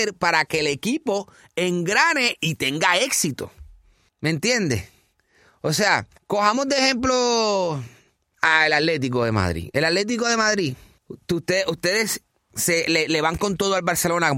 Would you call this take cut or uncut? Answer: uncut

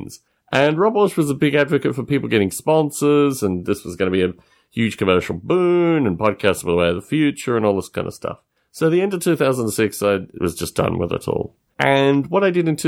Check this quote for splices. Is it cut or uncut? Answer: cut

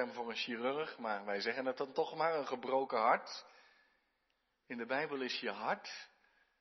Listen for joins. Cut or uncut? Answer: uncut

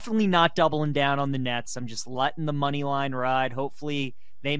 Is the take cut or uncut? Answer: uncut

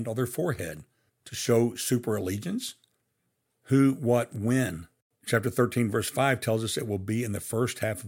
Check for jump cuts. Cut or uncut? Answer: cut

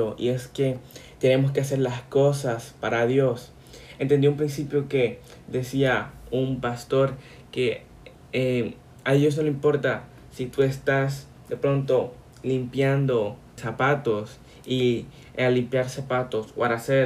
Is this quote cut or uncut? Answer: cut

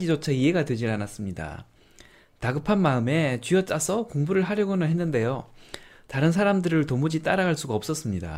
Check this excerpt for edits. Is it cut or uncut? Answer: uncut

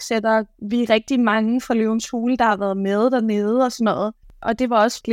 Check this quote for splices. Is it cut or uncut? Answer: cut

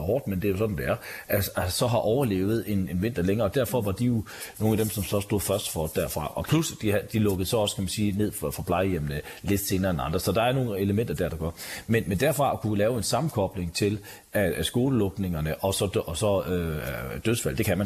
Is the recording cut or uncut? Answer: uncut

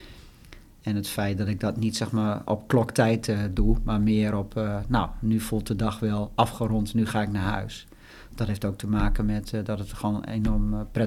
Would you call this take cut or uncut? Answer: uncut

